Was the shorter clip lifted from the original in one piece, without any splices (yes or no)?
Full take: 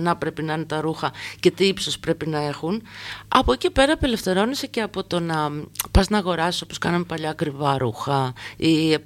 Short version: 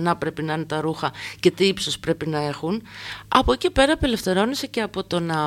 yes